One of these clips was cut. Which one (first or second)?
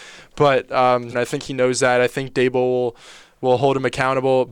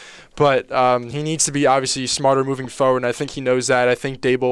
first